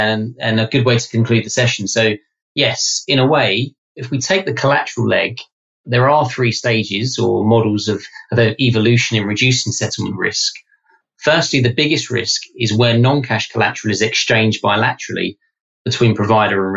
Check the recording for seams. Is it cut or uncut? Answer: uncut